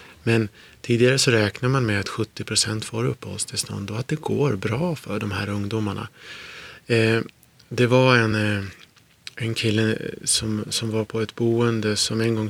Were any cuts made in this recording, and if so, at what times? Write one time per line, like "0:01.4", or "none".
none